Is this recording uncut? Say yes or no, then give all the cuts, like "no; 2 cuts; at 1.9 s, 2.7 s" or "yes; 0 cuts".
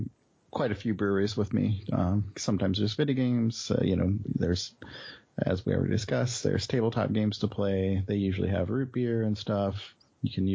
yes; 0 cuts